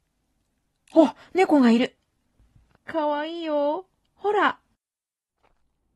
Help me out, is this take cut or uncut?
uncut